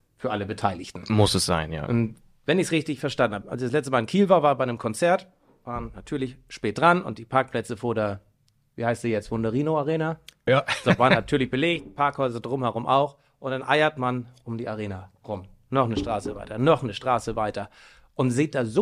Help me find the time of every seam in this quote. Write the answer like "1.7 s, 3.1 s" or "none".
3.4 s, 10.5 s, 16.5 s